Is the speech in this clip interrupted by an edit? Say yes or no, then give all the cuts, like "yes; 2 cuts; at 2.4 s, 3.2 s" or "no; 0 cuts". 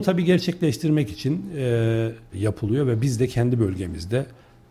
yes; 1 cut; at 2.3 s